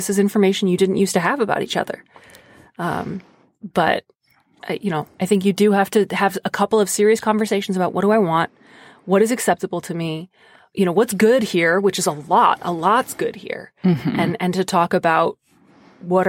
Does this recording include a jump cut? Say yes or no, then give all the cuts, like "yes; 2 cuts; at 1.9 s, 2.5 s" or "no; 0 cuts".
no; 0 cuts